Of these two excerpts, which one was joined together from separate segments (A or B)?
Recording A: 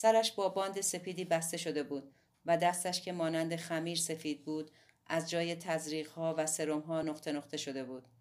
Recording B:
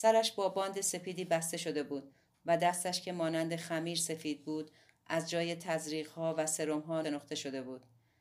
B